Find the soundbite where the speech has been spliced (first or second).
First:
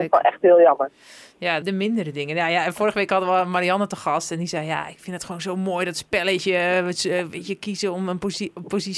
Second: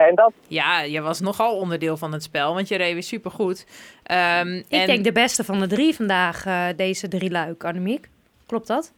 first